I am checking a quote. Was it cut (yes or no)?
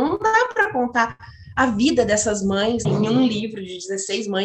yes